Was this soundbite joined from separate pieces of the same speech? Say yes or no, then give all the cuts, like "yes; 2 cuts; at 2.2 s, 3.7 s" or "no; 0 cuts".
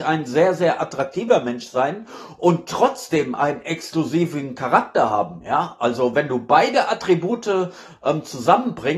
no; 0 cuts